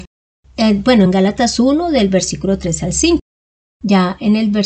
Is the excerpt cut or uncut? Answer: uncut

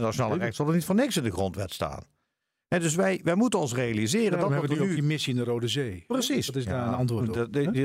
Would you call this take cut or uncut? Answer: uncut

